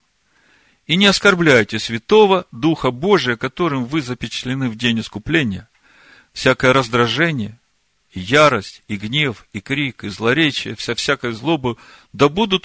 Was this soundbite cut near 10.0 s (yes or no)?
no